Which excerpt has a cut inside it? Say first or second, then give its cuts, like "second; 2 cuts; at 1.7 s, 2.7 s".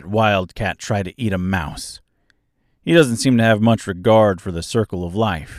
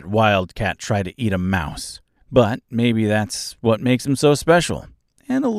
second; 1 cut; at 2.2 s